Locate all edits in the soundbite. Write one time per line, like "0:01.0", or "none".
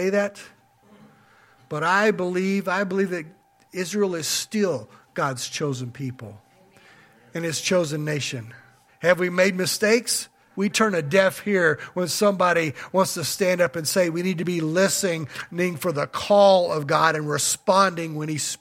0:08.9
0:10.5

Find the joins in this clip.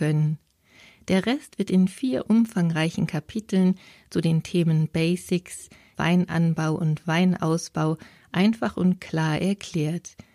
0:05.9

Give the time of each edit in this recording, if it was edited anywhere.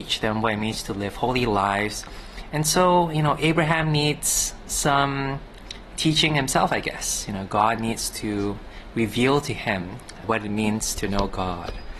0:10.2

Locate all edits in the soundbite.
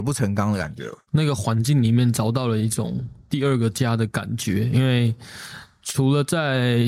0:01.1

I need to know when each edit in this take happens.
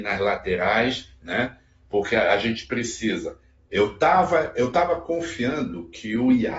0:03.7

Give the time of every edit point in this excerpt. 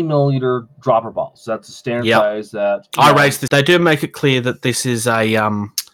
0:03.5

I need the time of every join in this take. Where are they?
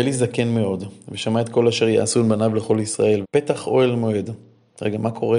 0:03.2

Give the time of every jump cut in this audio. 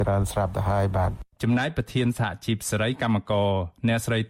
0:01.3

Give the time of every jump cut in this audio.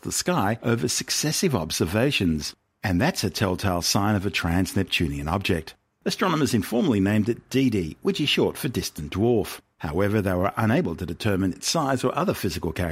0:06.0
0:09.7

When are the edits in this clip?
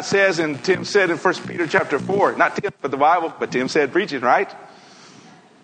none

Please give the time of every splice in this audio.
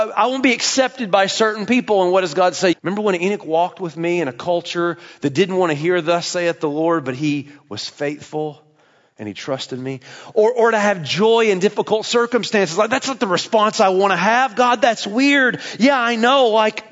0:02.7

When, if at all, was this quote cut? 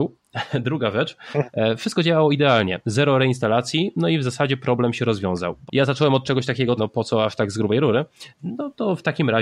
0:05.7
0:06.8
0:08.3

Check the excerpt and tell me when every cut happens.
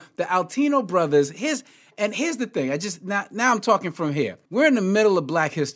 0:04.5

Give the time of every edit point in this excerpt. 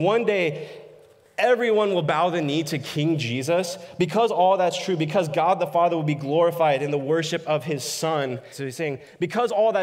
0:08.5

